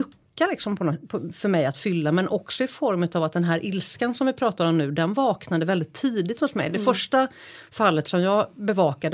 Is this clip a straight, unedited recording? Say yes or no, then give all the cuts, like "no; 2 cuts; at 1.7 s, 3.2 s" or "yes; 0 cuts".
yes; 0 cuts